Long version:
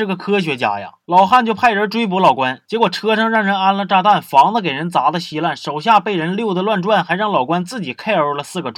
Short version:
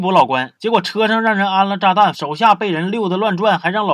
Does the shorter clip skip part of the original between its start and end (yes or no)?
yes